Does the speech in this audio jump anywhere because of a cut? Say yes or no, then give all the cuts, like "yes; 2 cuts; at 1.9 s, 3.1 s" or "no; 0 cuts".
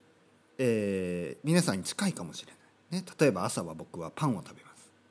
no; 0 cuts